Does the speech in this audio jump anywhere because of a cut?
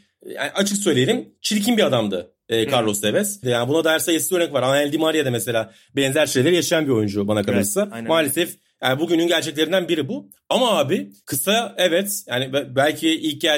yes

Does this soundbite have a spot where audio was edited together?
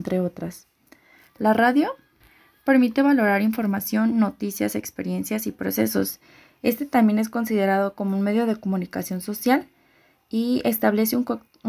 no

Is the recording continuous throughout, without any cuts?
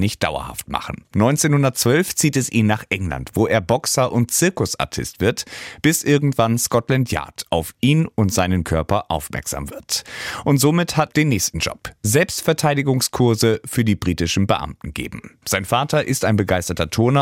no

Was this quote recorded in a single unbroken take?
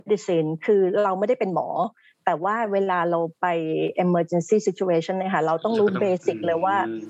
yes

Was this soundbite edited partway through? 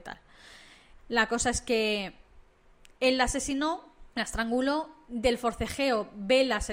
yes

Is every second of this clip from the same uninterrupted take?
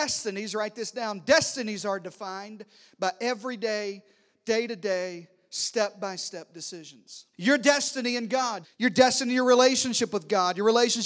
no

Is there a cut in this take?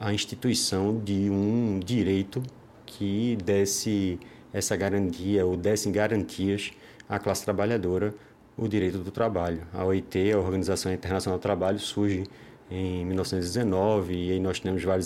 no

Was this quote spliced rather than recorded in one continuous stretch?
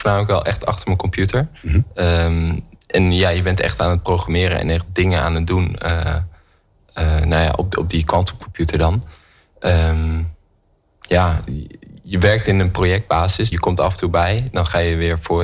yes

